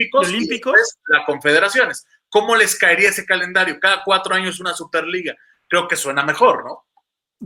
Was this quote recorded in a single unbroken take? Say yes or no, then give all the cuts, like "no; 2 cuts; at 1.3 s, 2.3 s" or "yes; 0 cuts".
yes; 0 cuts